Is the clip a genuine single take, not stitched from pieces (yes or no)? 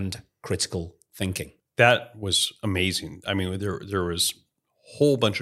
yes